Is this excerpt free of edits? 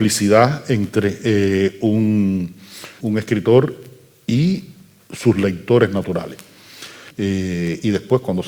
no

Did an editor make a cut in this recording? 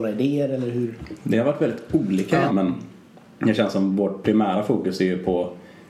yes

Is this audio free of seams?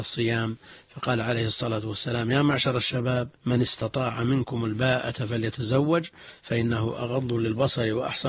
no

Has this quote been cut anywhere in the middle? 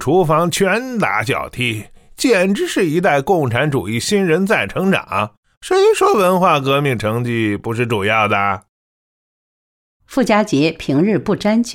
no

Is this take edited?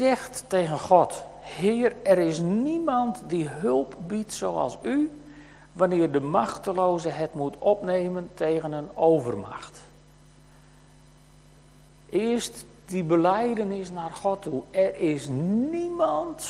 no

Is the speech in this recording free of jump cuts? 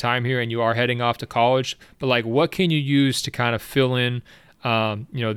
yes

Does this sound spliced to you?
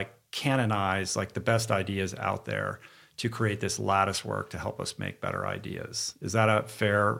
no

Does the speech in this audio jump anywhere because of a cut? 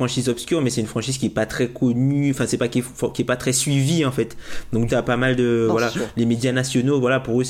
yes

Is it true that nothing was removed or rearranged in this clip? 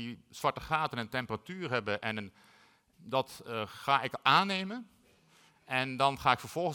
no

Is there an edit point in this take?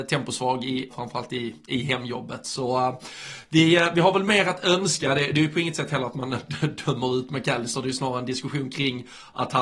yes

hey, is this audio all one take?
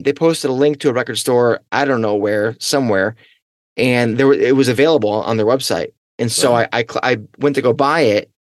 yes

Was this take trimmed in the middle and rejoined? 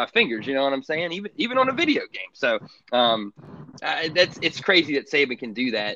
no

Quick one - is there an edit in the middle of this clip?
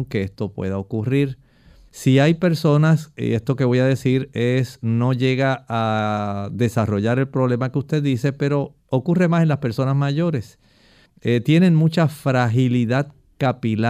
yes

